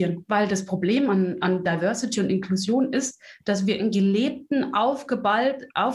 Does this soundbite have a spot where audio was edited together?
no; 0 cuts

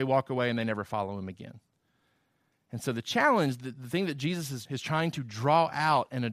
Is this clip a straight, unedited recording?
no; 1 cut; at 4.7 s

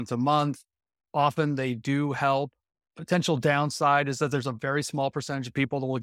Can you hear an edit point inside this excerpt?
yes; 1 cut; at 1.0 s

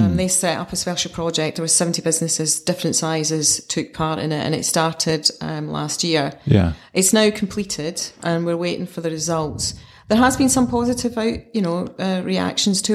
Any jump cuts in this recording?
no; 0 cuts

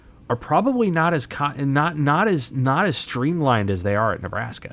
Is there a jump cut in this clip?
no; 0 cuts

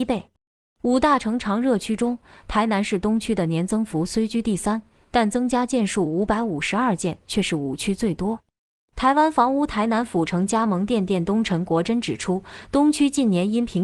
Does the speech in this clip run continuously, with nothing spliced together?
yes; 0 cuts

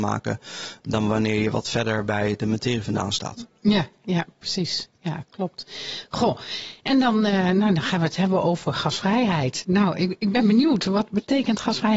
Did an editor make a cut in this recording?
no; 0 cuts

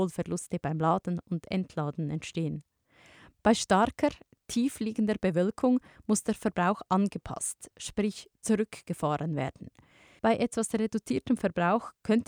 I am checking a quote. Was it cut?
yes; 1 cut; at 10.2 s

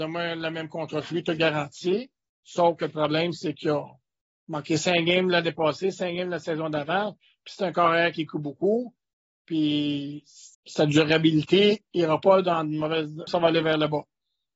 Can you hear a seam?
yes; 2 cuts; at 10.5 s, 13.3 s

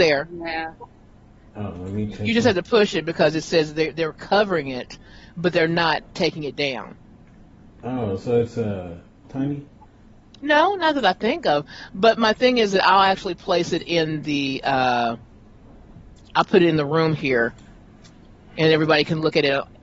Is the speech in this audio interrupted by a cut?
yes; 1 cut; at 9.2 s

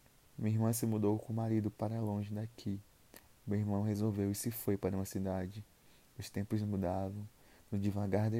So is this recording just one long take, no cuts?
yes; 0 cuts

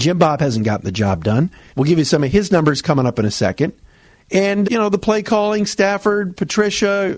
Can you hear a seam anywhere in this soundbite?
yes; 2 cuts; at 1.7 s, 4.6 s

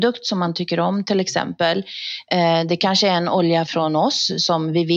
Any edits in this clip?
yes; 1 cut; at 3.7 s

